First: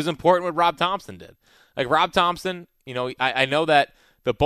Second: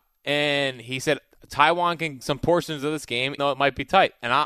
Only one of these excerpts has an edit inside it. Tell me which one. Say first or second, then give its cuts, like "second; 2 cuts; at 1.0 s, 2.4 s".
second; 2 cuts; at 2.2 s, 3.4 s